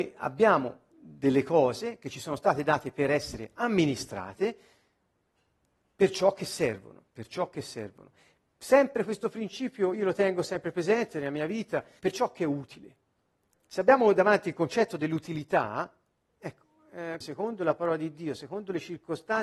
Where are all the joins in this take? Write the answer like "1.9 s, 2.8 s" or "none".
7.1 s, 12.0 s, 17.2 s